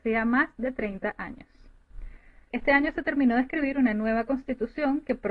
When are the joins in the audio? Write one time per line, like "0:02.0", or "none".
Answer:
0:02.5